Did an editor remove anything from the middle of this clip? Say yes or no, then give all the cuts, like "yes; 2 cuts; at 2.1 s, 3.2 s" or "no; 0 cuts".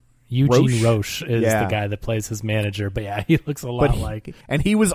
no; 0 cuts